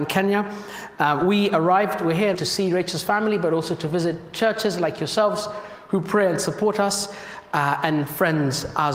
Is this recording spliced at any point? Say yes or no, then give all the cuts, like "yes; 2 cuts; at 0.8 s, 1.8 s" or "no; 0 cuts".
yes; 1 cut; at 2.3 s